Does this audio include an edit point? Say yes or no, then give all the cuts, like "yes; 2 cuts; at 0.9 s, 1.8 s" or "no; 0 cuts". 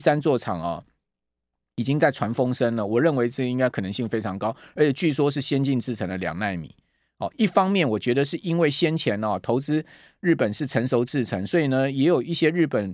no; 0 cuts